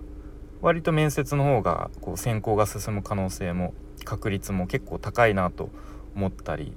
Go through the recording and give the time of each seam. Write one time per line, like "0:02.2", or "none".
none